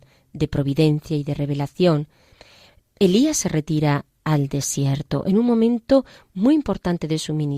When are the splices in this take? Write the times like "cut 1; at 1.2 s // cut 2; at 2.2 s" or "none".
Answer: none